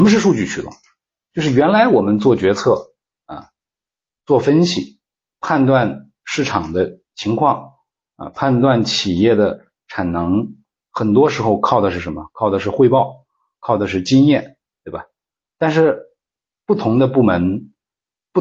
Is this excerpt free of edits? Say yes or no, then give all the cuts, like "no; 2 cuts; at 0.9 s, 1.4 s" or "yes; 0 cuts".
no; 1 cut; at 10.8 s